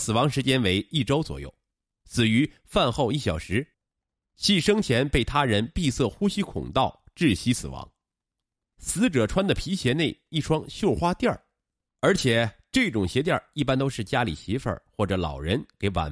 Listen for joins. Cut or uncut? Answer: cut